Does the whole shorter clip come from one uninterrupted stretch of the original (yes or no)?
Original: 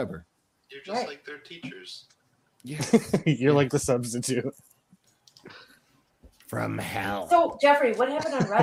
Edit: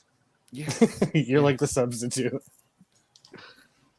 yes